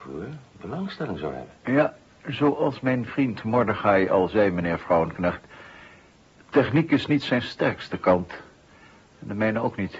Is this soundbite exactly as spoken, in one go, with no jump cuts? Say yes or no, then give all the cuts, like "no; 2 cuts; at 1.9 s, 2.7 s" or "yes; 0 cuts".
no; 1 cut; at 1.6 s